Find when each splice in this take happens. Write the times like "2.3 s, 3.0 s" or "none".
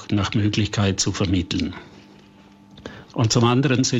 3.1 s